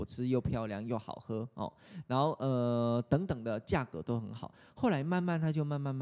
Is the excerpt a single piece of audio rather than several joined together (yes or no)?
yes